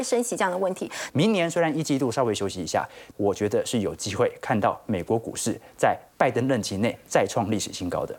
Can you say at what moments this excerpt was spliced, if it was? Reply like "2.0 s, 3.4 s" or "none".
1.1 s, 3.1 s